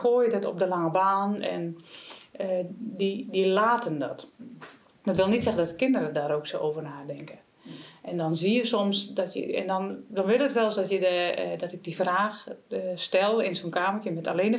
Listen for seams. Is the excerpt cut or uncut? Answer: uncut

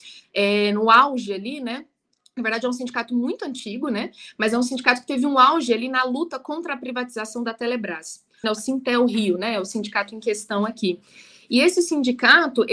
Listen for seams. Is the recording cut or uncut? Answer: cut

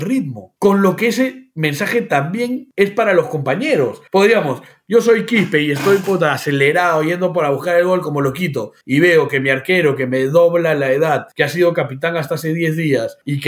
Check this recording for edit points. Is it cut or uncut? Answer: uncut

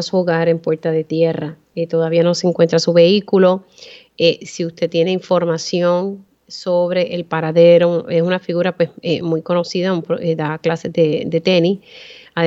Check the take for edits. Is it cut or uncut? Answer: uncut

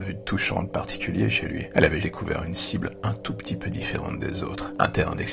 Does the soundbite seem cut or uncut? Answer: cut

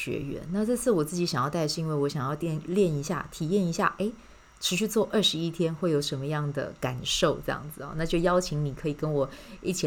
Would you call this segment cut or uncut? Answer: uncut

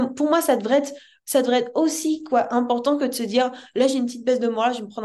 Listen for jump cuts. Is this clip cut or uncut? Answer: uncut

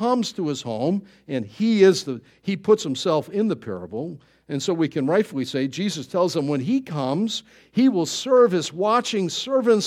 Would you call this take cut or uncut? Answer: uncut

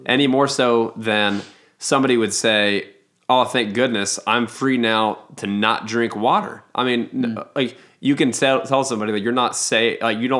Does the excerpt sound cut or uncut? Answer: uncut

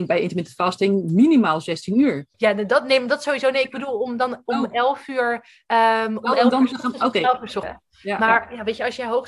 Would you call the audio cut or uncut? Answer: cut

